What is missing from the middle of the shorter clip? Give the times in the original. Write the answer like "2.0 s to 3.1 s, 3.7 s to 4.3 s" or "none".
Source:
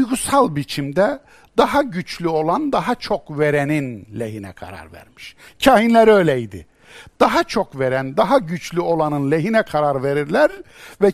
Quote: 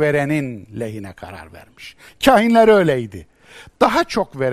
none